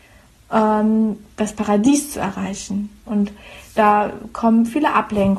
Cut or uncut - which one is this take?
cut